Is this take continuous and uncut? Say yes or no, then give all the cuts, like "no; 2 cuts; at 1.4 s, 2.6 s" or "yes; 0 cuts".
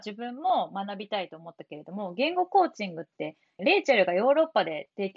no; 1 cut; at 3.6 s